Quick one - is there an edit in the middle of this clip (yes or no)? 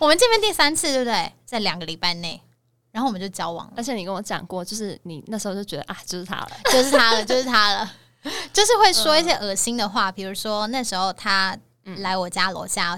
no